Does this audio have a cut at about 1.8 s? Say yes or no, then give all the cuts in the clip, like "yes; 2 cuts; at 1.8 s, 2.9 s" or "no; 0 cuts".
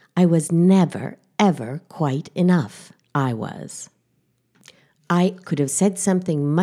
no; 2 cuts; at 3.0 s, 5.4 s